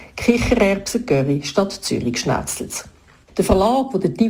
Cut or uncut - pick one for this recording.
uncut